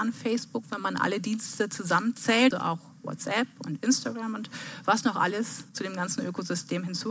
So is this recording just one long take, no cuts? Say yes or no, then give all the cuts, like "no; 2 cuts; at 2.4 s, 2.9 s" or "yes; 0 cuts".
no; 2 cuts; at 2.5 s, 5.7 s